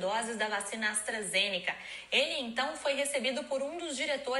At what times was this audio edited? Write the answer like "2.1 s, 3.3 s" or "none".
none